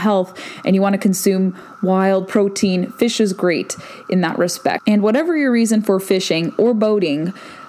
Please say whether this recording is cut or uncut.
uncut